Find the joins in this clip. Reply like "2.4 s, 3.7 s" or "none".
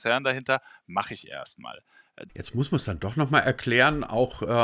2.3 s